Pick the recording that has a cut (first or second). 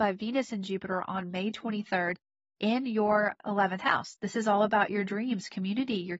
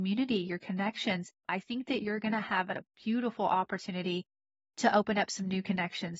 second